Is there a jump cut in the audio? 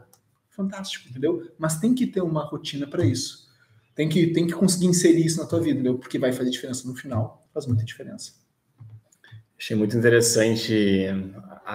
no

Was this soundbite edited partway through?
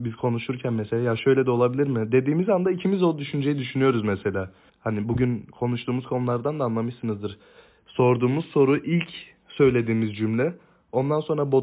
yes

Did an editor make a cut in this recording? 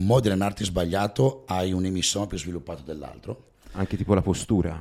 no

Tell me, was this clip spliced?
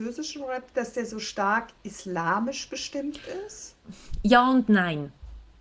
no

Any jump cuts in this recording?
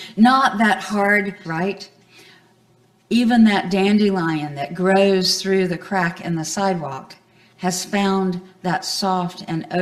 yes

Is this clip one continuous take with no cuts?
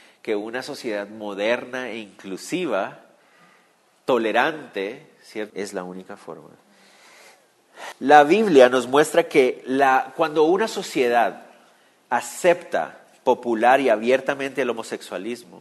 no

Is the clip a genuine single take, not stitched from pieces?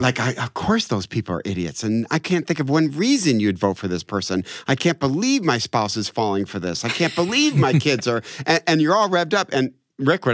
yes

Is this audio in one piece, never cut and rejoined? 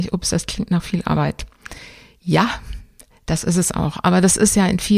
yes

